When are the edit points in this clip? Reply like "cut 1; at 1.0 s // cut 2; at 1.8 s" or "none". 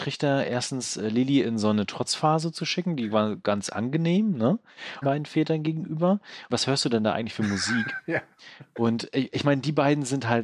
cut 1; at 5.0 s // cut 2; at 6.5 s